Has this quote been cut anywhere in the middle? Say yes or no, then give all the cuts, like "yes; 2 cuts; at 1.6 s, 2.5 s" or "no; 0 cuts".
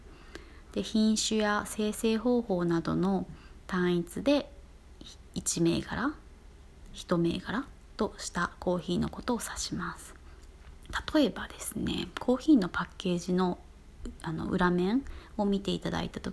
yes; 1 cut; at 5.3 s